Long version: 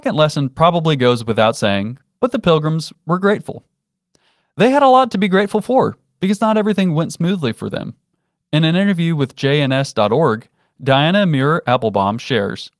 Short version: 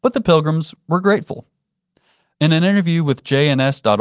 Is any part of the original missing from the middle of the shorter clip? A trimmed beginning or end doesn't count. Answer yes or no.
yes